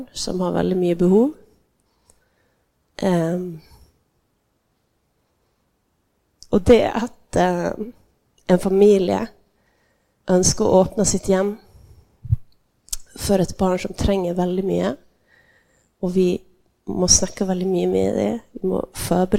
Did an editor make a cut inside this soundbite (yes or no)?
no